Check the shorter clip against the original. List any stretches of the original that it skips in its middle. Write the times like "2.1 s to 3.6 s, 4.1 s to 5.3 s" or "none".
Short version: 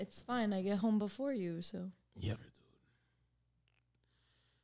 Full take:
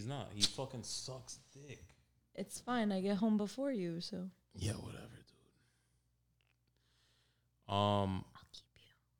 4.7 s to 5.1 s